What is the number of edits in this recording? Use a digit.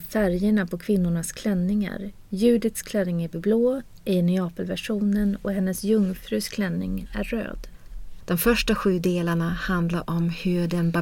1